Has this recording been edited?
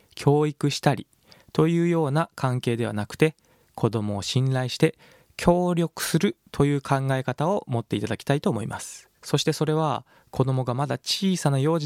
yes; 1 cut; at 9.2 s

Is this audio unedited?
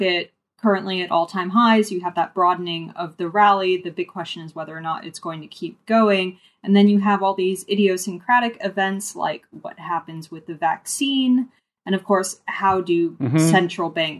yes; 0 cuts

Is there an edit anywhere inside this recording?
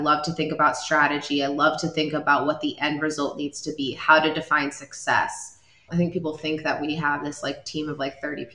yes; 1 cut; at 5.9 s

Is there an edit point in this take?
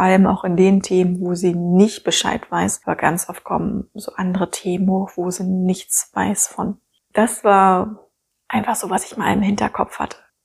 yes; 2 cuts; at 2.8 s, 7.0 s

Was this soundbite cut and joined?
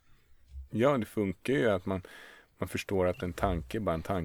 no; 0 cuts

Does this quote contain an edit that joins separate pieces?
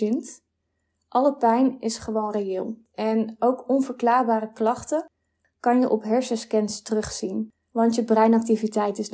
no; 0 cuts

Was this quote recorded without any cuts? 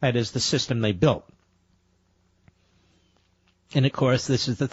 yes; 0 cuts

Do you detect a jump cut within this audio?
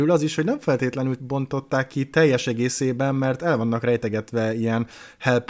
yes; 1 cut; at 1.2 s

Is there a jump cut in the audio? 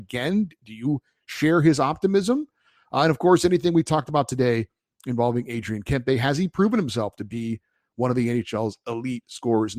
no; 0 cuts

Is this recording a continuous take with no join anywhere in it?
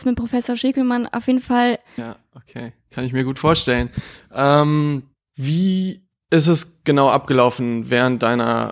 no; 1 cut; at 2.0 s

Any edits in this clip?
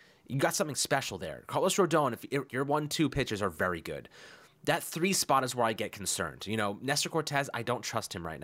yes; 1 cut; at 2.5 s

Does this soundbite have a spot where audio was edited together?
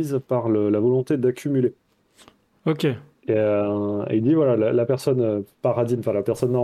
no; 0 cuts

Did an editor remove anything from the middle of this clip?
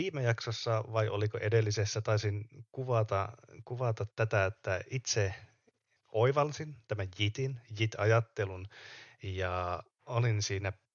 yes; 1 cut; at 6.0 s

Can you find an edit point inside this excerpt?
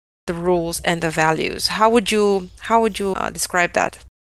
yes; 1 cut; at 3.1 s

